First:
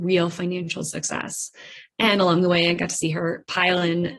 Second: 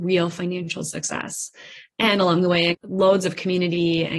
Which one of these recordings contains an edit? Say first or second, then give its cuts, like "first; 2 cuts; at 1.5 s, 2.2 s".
second; 1 cut; at 2.7 s